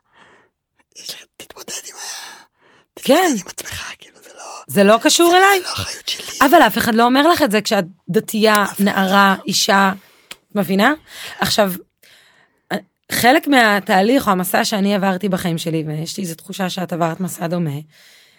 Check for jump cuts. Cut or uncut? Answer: uncut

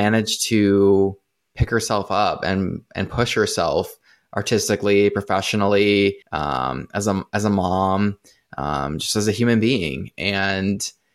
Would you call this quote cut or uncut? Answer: cut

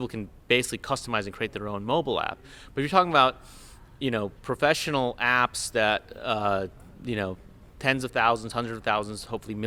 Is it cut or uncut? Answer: uncut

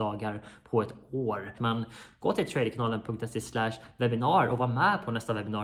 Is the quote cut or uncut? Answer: cut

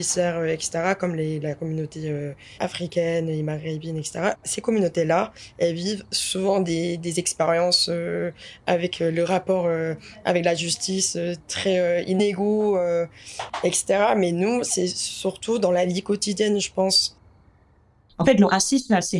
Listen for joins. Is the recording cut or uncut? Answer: uncut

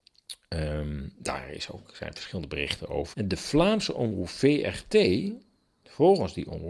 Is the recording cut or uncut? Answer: cut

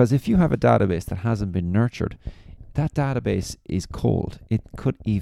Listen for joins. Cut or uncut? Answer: uncut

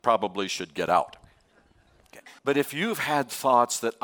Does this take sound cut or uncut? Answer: cut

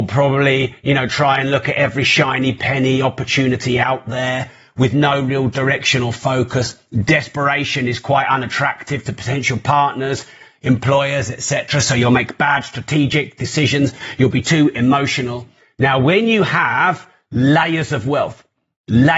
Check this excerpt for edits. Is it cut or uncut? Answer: uncut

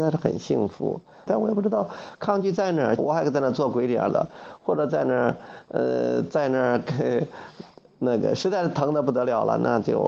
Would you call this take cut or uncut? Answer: cut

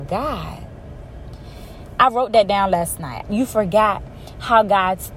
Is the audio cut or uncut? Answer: cut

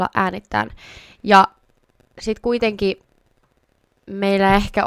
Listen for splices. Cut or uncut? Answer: uncut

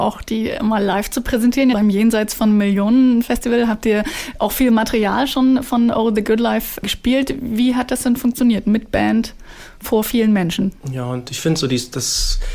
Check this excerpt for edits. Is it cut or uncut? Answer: cut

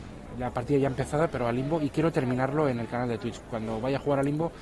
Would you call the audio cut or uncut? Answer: uncut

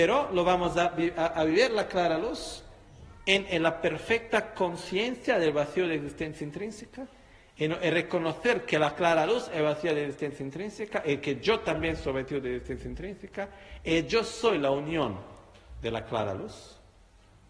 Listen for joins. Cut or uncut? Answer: uncut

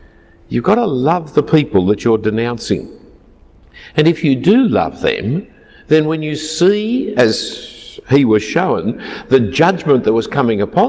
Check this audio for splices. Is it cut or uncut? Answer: uncut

